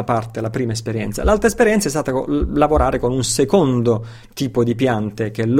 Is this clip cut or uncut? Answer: uncut